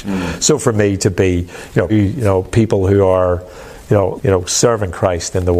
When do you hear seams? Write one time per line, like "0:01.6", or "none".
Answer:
0:01.9
0:04.2